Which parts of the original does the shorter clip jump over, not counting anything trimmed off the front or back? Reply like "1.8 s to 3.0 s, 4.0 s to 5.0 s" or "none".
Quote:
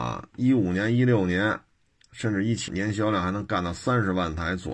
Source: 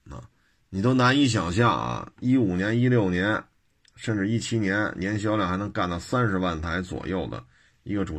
4.5 s to 4.9 s